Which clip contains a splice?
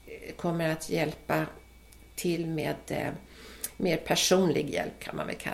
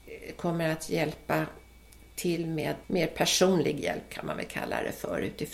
second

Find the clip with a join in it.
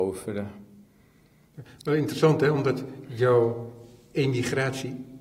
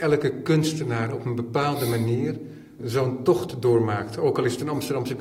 second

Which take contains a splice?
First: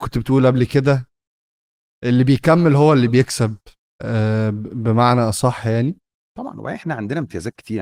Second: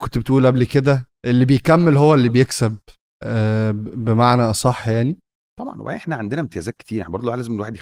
second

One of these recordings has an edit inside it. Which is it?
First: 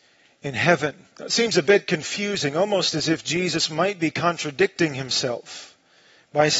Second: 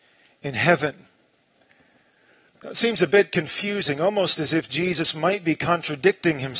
first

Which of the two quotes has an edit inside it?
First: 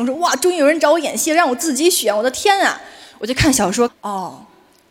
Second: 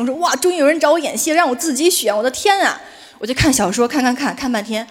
first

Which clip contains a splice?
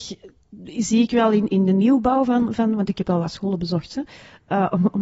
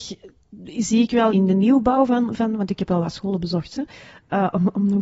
second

